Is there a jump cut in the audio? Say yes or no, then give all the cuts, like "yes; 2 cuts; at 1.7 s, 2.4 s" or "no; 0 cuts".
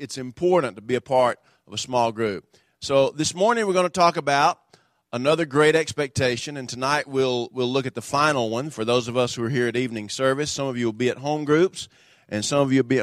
no; 0 cuts